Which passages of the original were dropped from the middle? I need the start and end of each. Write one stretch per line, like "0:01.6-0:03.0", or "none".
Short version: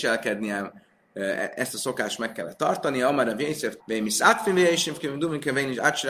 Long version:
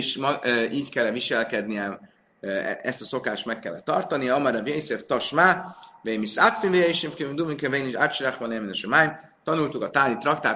0:05.1-0:06.0